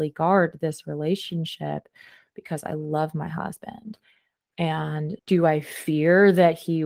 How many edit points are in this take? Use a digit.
1